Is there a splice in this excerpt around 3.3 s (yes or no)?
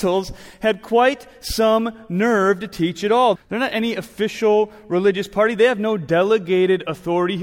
yes